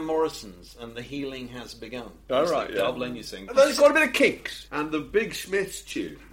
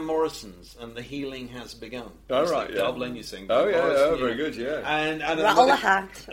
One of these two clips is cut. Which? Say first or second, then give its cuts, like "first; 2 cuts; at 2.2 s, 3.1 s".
first; 2 cuts; at 3.5 s, 4.7 s